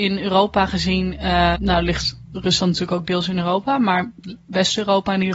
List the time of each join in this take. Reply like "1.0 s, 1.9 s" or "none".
1.6 s